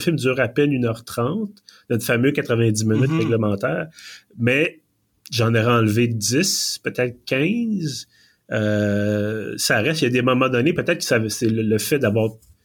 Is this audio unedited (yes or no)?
yes